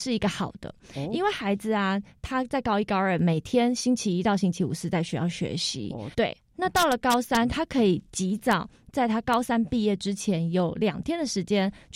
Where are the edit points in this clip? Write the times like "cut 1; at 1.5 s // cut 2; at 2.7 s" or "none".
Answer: cut 1; at 6.1 s // cut 2; at 7.5 s